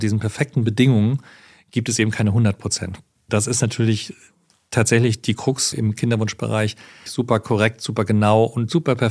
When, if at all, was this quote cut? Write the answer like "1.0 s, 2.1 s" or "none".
5.7 s, 7.1 s

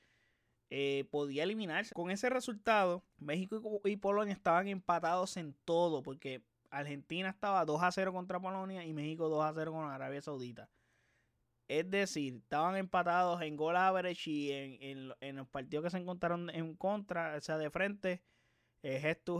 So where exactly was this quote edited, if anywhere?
1.9 s, 3.1 s

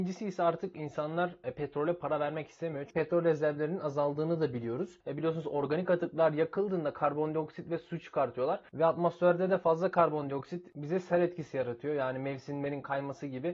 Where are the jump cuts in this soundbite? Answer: 5.0 s

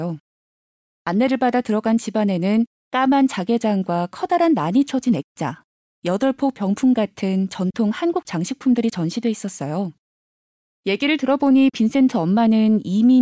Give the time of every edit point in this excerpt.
none

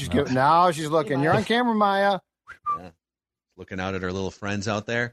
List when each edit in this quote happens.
none

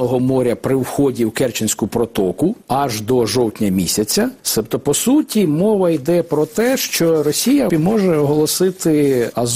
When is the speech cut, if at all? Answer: 7.7 s

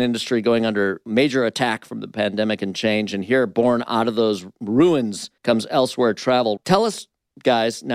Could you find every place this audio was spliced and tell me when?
5.4 s, 6.6 s

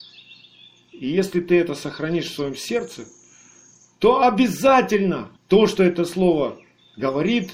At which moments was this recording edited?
5.4 s

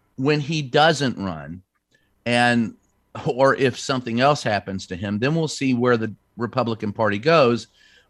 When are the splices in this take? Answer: none

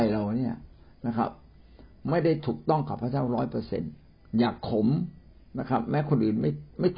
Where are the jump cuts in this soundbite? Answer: none

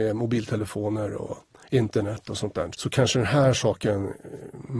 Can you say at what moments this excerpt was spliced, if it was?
2.7 s

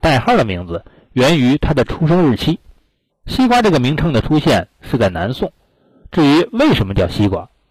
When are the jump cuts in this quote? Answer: 3.1 s

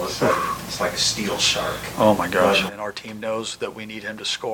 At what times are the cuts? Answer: 2.7 s

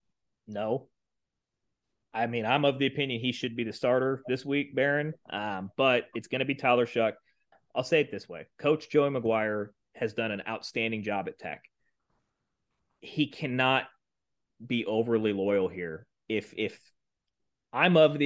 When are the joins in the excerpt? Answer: 7.5 s

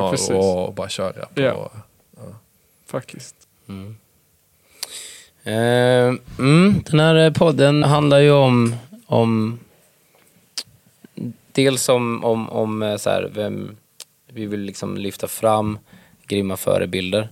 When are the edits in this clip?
7.8 s

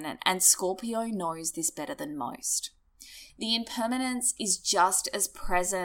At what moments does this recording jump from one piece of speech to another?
3.3 s

